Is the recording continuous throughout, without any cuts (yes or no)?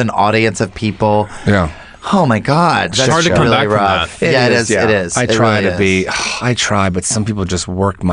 yes